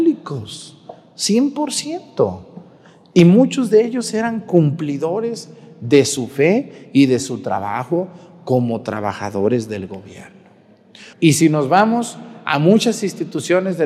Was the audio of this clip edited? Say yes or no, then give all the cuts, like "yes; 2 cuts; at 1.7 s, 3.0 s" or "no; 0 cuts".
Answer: yes; 1 cut; at 11.1 s